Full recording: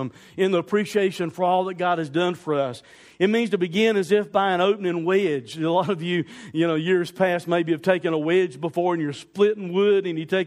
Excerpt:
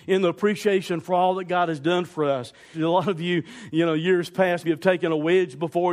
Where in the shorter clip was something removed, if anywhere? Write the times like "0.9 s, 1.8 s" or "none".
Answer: 2.7 s, 4.6 s